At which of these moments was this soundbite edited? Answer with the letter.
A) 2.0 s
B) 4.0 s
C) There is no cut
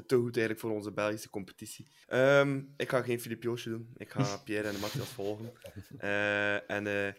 A